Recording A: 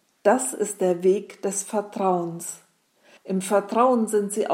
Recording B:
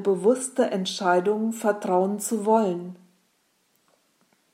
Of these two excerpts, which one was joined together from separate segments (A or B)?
A